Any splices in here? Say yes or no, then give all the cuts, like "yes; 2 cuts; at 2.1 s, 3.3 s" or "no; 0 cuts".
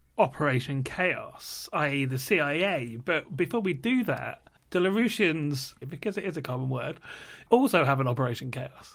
yes; 2 cuts; at 5.8 s, 7.5 s